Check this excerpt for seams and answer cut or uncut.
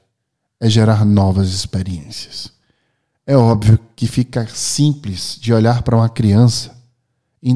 uncut